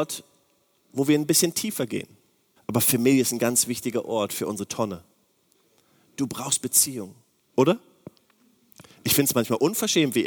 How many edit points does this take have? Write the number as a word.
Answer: two